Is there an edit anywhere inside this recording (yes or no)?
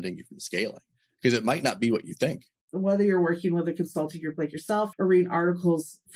yes